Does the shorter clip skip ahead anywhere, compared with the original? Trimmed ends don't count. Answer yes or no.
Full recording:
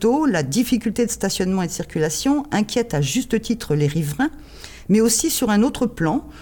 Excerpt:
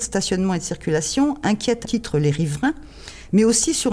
yes